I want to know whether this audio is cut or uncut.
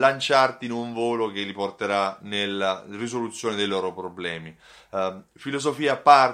uncut